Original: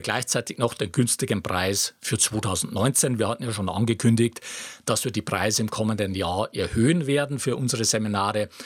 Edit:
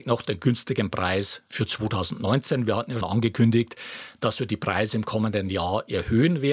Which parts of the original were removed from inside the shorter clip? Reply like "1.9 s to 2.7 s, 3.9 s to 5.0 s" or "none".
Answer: 3.5 s to 3.7 s